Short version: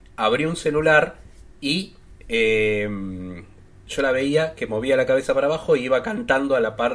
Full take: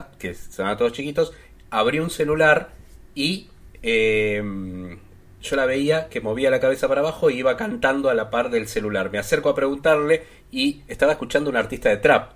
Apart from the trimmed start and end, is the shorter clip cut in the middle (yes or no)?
no